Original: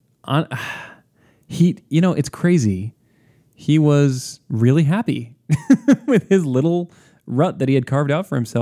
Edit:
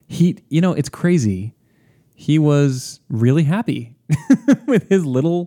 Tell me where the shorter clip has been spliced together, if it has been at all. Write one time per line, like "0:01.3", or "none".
none